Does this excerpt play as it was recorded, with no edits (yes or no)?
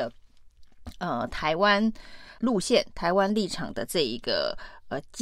no